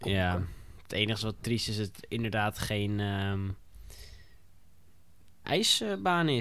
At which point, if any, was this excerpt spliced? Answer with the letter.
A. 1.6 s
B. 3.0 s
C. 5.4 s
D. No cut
C